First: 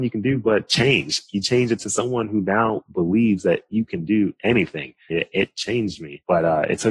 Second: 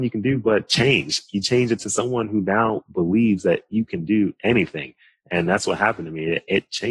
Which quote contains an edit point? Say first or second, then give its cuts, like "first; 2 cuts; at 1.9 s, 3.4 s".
first; 1 cut; at 5.1 s